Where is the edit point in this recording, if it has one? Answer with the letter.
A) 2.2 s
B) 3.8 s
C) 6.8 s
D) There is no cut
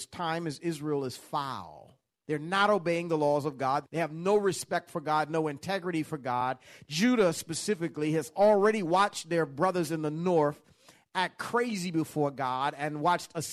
B